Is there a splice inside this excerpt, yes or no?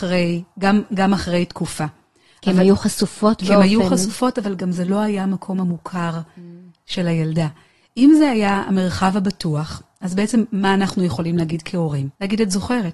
no